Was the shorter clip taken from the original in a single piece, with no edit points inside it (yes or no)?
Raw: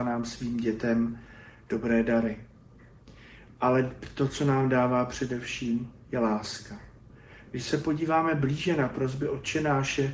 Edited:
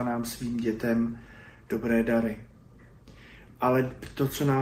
yes